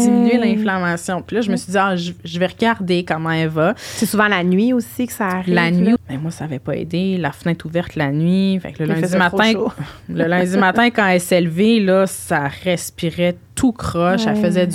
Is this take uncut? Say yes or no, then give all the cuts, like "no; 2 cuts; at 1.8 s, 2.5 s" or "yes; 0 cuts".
no; 1 cut; at 6.0 s